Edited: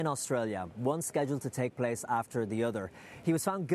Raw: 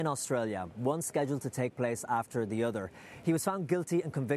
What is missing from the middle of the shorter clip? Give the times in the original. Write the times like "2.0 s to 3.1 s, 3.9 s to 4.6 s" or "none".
none